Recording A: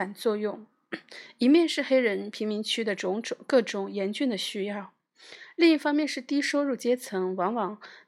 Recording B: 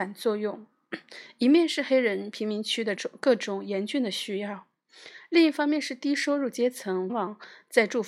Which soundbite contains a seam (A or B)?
B